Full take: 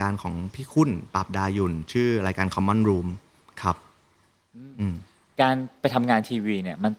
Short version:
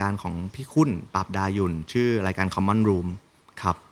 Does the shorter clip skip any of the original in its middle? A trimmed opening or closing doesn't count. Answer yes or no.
no